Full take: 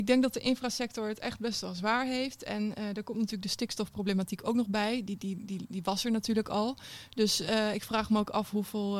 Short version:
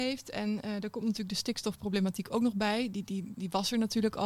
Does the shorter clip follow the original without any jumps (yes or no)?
no